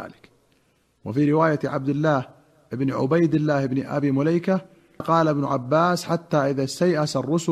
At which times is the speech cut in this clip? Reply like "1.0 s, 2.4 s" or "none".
5.0 s